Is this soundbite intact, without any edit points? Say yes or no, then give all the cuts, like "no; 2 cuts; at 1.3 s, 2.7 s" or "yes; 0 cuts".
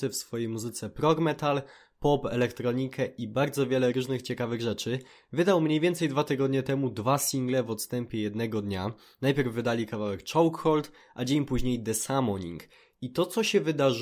yes; 0 cuts